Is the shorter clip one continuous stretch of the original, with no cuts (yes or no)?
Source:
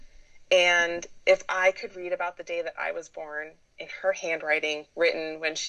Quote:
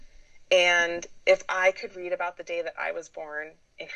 yes